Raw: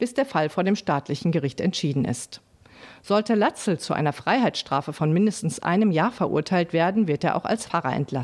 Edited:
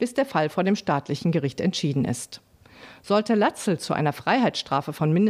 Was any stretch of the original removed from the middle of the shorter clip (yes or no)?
no